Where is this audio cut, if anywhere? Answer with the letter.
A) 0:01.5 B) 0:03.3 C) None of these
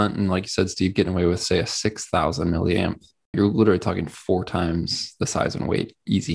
B